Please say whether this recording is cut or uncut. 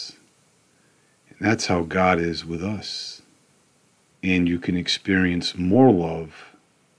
cut